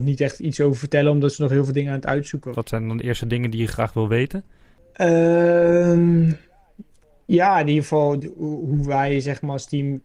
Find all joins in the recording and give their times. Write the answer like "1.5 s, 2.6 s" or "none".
2.5 s